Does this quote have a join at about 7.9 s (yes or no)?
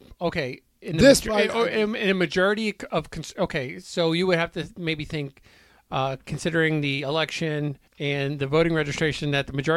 yes